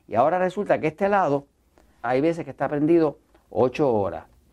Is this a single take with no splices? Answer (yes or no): no